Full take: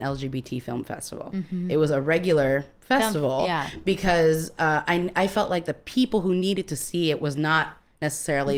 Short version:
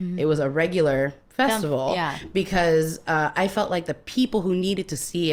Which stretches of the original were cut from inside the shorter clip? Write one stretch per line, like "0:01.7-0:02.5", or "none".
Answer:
0:04.9-0:05.1

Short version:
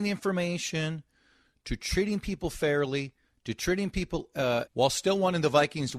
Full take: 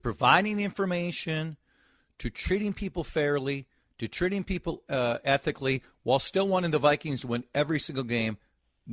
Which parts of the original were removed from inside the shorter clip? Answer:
0:05.2-0:06.0

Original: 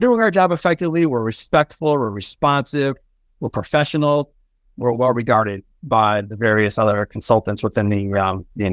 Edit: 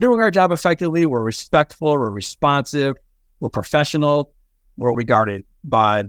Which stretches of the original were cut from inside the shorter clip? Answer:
0:04.9-0:05.1

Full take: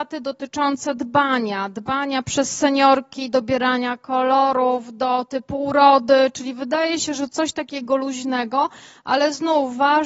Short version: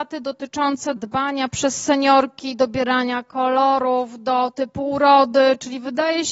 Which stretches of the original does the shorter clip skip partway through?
0:01.0-0:01.7

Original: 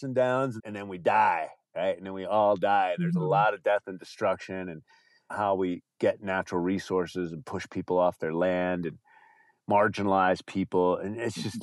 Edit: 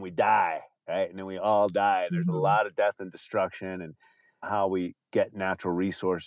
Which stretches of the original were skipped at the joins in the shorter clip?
none

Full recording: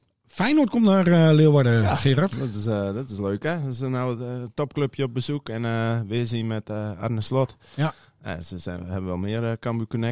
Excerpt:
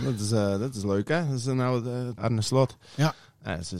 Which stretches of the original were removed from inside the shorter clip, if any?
0:04.5-0:07.0

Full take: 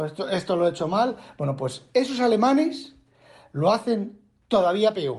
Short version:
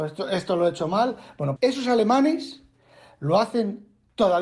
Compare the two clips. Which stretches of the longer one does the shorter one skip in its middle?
0:01.6-0:01.9

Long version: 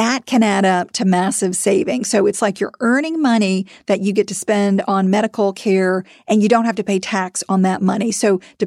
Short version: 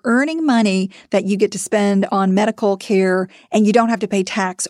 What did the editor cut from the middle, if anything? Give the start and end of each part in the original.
none

